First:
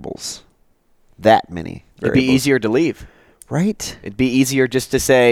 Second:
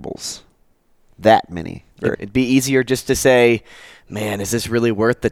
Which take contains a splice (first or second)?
second